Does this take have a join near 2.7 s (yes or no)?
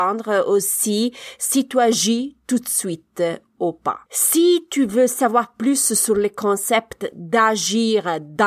no